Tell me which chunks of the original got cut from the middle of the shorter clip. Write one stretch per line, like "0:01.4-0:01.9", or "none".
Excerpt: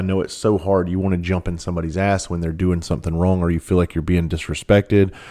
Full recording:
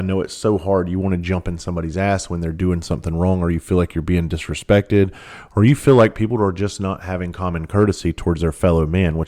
none